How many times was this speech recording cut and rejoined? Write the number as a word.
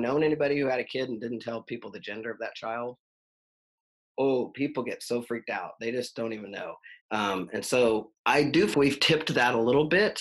two